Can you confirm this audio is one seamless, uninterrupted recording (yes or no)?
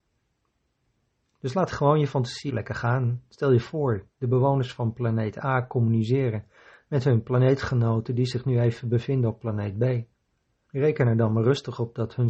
no